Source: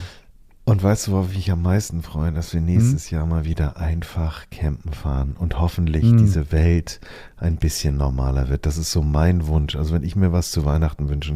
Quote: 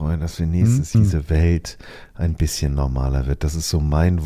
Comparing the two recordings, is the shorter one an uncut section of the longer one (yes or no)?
no